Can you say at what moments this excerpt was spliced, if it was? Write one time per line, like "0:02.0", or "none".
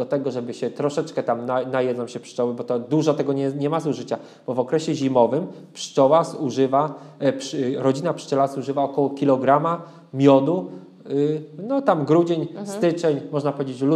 none